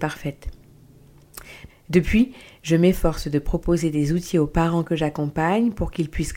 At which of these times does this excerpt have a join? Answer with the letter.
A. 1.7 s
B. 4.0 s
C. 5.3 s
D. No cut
A